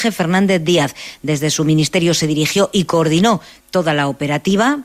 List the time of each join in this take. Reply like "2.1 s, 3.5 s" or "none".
none